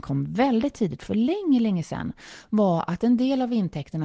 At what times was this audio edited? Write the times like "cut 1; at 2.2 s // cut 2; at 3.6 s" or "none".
none